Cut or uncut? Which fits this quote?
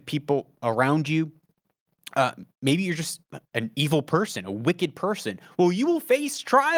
uncut